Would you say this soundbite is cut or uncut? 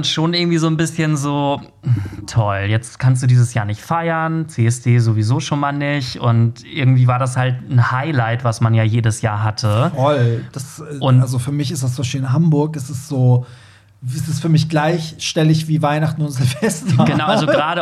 uncut